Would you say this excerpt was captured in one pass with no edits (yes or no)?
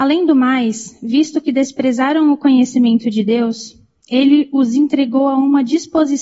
yes